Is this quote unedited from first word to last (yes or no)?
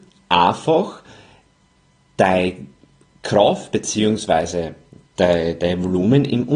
yes